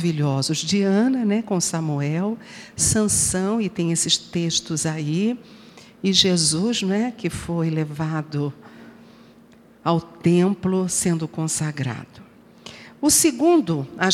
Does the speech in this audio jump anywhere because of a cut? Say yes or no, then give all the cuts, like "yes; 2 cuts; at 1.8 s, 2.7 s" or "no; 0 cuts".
no; 0 cuts